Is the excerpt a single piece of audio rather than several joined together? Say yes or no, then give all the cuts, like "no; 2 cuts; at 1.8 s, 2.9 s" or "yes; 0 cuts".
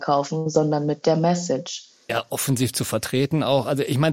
no; 1 cut; at 2.1 s